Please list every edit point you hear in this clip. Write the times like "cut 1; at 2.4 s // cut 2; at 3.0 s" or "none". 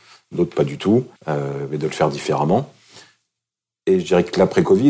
cut 1; at 1.2 s

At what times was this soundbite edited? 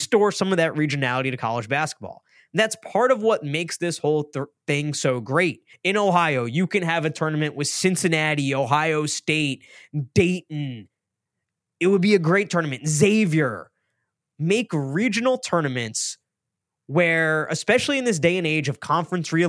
cut 1; at 5.7 s

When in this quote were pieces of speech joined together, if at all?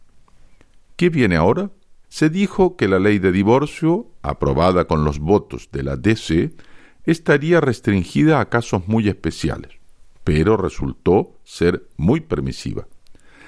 cut 1; at 2.0 s

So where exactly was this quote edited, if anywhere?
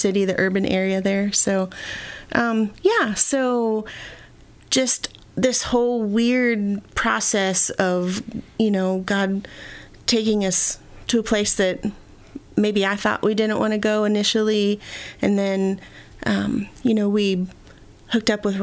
none

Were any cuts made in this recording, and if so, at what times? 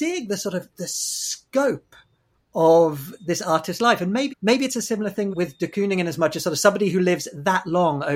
cut 1; at 3.2 s // cut 2; at 4.3 s // cut 3; at 5.3 s

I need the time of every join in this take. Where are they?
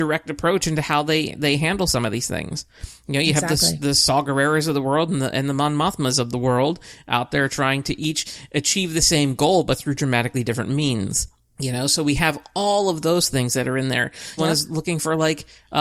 cut 1; at 11.5 s // cut 2; at 14.4 s

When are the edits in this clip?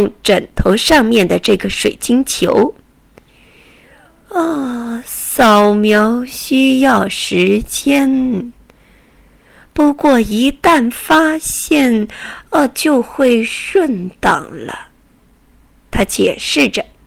none

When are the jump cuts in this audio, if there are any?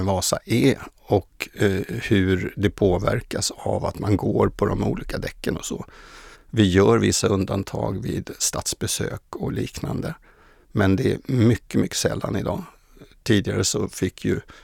cut 1; at 6.3 s

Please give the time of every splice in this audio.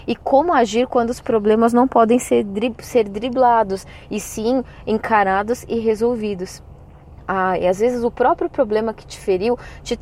none

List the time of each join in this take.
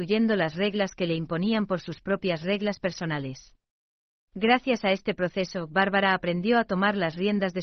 cut 1; at 4.2 s

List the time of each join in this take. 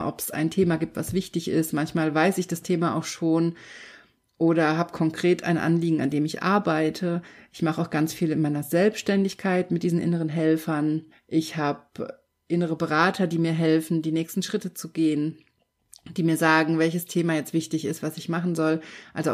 cut 1; at 11.1 s

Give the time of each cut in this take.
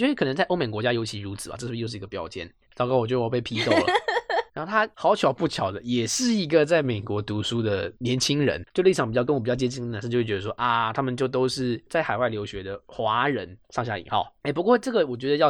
cut 1; at 2.7 s // cut 2; at 4.5 s

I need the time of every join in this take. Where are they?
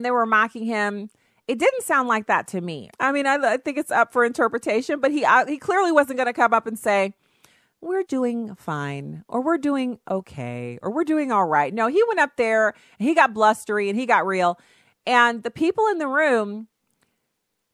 cut 1; at 2.9 s // cut 2; at 8.1 s

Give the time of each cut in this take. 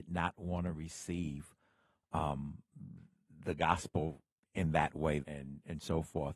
cut 1; at 5.2 s

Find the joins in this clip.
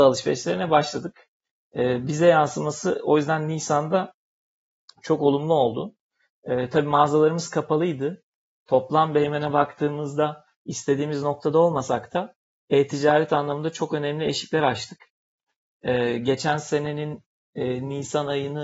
none

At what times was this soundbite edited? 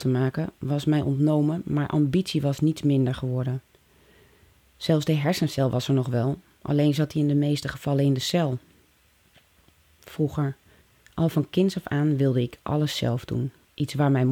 none

